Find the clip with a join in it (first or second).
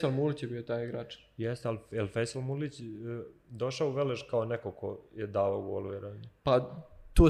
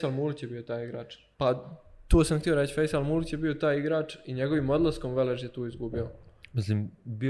second